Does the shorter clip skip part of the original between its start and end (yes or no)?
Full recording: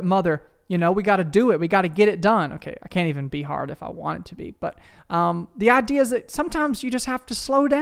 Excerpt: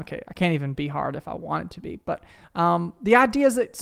no